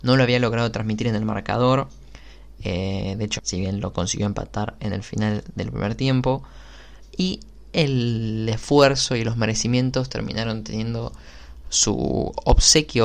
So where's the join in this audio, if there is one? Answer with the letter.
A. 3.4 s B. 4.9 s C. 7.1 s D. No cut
A